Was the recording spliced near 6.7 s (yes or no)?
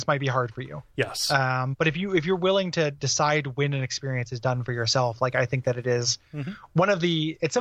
no